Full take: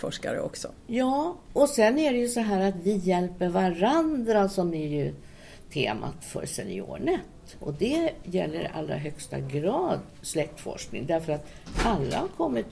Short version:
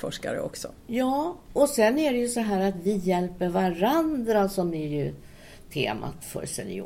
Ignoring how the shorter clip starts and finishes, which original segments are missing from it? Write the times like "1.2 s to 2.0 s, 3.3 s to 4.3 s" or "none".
none